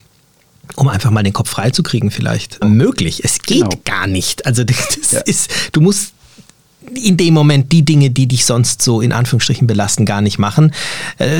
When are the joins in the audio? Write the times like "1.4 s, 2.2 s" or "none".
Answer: 2.6 s